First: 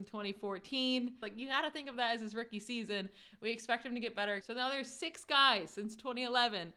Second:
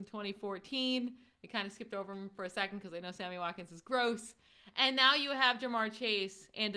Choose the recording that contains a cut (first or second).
first